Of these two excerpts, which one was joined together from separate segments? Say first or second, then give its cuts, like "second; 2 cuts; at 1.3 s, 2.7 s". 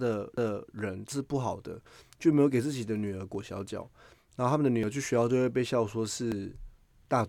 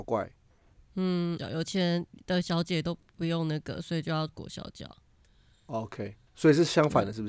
second; 1 cut; at 1.4 s